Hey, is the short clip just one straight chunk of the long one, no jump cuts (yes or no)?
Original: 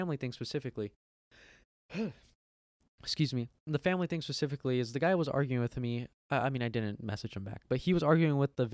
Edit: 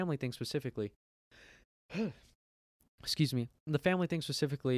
yes